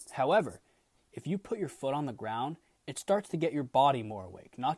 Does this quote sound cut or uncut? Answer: cut